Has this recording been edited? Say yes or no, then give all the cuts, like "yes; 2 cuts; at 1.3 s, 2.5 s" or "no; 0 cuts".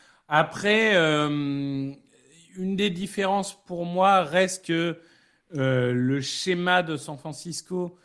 no; 0 cuts